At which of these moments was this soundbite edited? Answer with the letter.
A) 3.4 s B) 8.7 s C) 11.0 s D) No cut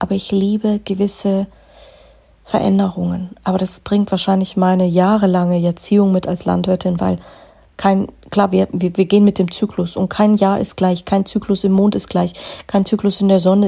B